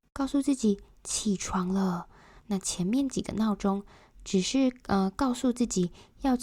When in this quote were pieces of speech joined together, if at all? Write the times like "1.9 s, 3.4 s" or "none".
2.4 s